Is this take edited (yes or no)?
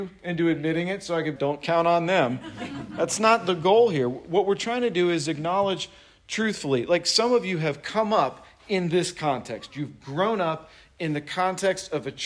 yes